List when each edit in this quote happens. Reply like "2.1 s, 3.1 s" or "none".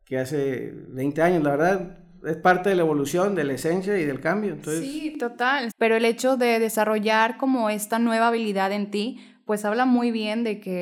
5.7 s